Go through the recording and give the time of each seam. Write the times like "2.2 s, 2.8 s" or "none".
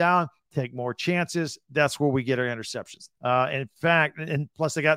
3.1 s